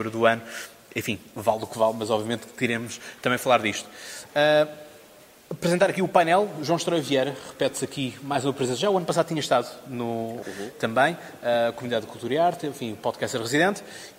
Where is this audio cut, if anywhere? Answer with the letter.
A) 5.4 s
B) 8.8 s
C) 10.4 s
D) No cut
C